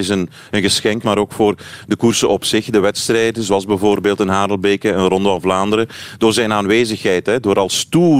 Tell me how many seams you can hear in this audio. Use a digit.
1